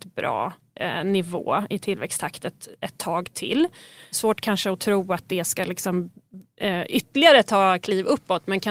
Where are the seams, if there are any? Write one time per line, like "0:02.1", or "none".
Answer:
0:04.1